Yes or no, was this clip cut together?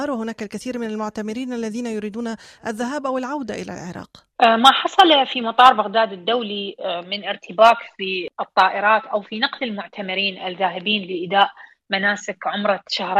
yes